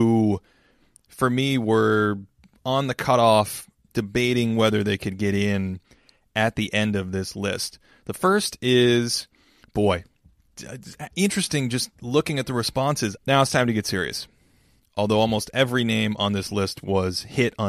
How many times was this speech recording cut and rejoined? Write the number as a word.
three